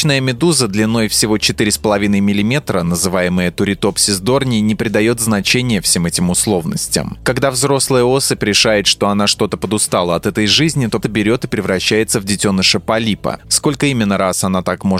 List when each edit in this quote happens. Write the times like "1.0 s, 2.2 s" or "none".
11.0 s, 13.4 s